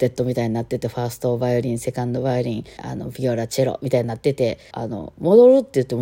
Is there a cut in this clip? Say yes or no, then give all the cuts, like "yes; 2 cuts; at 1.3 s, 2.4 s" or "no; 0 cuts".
yes; 2 cuts; at 2.8 s, 4.7 s